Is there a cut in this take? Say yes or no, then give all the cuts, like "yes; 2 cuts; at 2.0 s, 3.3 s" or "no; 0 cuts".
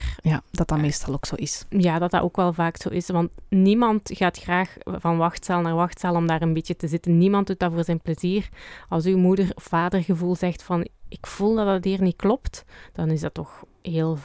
no; 0 cuts